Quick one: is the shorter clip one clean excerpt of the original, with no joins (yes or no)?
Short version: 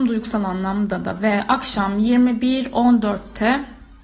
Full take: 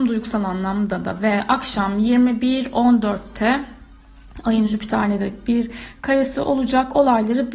yes